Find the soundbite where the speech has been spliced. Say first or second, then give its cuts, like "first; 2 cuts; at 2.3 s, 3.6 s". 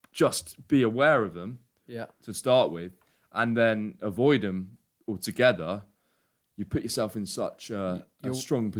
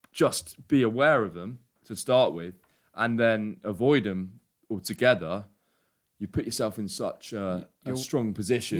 second; 1 cut; at 1.8 s